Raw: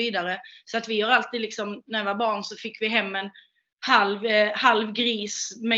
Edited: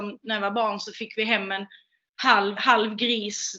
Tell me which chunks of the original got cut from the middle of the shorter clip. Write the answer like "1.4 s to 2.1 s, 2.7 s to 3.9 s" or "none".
4.2 s to 4.5 s